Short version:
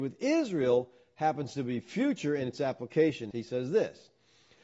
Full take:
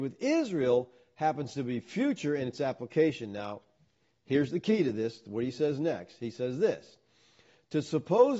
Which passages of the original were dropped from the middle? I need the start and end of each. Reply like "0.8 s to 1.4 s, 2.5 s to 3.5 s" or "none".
3.3 s to 6.2 s